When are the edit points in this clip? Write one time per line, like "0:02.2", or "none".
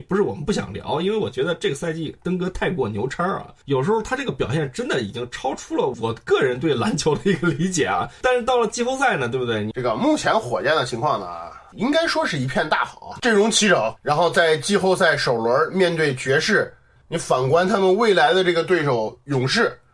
0:09.7
0:17.0